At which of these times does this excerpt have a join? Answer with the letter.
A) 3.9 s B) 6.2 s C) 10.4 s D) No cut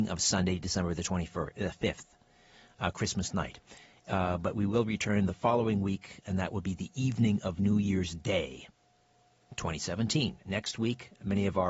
D